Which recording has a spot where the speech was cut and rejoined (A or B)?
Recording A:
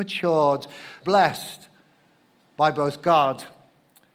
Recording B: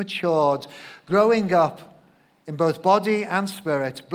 A